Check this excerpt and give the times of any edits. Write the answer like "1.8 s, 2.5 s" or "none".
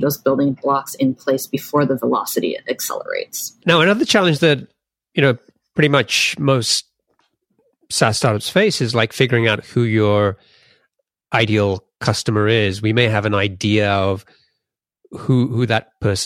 3.6 s